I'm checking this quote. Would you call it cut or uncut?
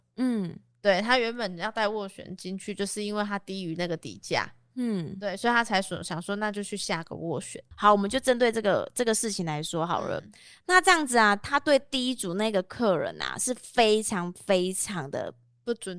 uncut